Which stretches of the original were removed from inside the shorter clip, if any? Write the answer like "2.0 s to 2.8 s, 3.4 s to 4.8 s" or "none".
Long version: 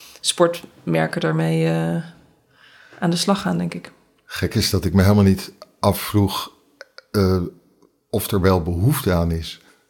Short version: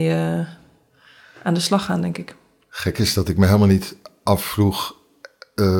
none